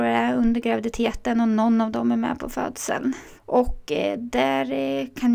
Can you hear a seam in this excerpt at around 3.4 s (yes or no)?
yes